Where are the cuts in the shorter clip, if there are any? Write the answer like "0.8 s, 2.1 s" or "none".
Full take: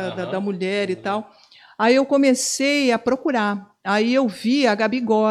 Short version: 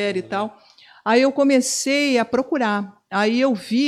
none